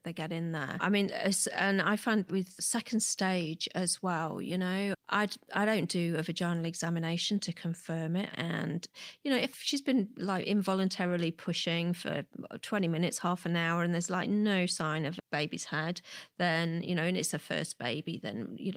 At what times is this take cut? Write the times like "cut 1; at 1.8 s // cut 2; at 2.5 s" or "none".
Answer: cut 1; at 2.3 s // cut 2; at 8.3 s